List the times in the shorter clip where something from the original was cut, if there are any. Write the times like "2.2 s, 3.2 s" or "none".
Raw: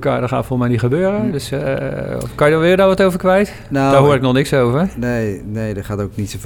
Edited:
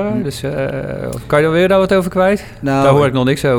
none